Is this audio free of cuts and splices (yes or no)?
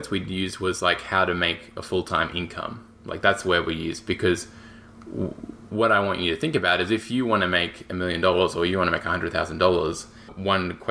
yes